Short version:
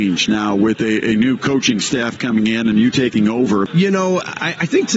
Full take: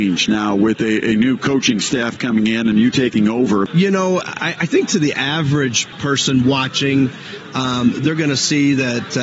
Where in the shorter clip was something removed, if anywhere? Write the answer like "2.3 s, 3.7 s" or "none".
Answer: none

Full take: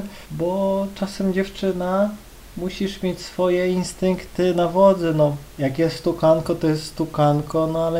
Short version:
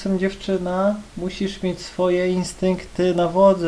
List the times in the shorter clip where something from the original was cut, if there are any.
1.1 s

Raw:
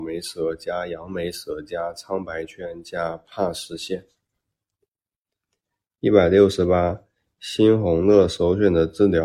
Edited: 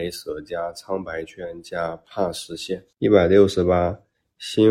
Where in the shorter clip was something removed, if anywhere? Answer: 2.9 s

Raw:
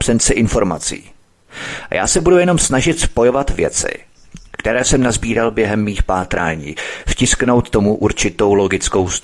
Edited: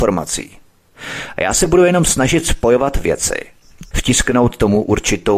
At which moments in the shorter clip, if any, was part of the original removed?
3.9 s

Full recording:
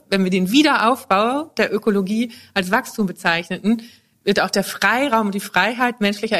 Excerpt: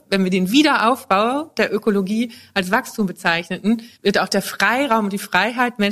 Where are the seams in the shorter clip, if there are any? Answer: 4.0 s

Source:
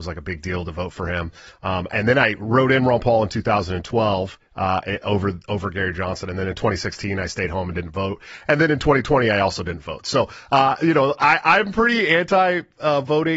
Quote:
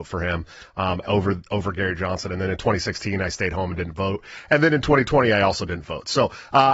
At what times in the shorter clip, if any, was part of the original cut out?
1.0 s

